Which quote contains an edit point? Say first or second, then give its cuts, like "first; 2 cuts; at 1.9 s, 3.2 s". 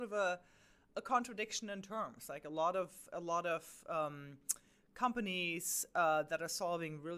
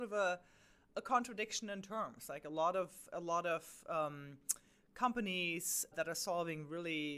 second; 1 cut; at 5.9 s